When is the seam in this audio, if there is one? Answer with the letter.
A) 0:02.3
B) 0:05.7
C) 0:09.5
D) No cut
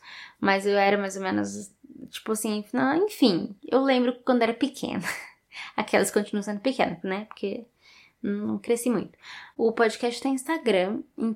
C